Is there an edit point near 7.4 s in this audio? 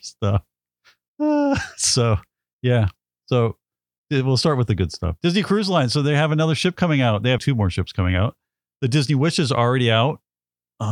yes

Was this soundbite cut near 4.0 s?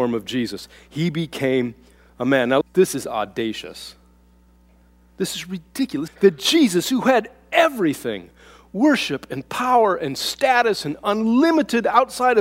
no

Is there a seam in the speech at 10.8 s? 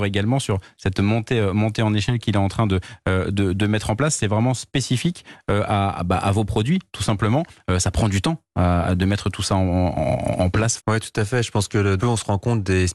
yes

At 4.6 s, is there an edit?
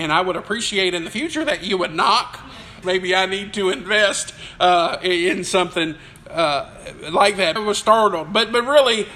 no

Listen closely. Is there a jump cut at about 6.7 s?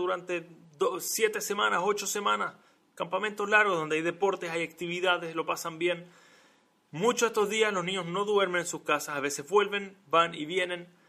no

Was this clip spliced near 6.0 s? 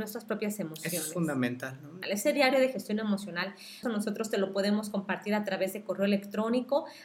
no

